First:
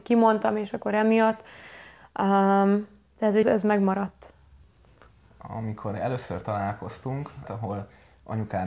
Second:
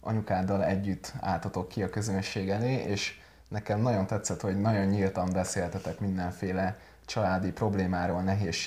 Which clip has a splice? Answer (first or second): first